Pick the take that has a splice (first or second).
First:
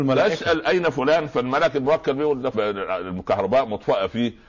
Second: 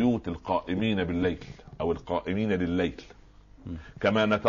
first